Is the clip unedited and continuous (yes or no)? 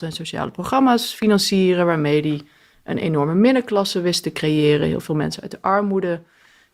yes